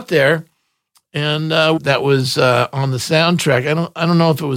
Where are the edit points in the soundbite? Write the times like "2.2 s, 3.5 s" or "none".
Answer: 1.8 s